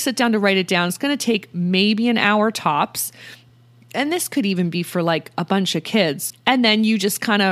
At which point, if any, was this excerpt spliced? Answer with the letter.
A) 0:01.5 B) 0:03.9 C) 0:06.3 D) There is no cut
C